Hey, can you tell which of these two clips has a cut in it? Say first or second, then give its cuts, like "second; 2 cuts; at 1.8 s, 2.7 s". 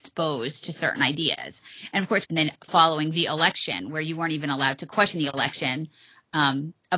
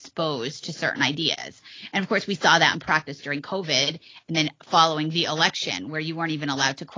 first; 1 cut; at 2.3 s